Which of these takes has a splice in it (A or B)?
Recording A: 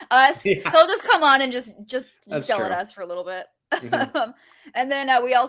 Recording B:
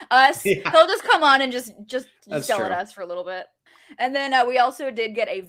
B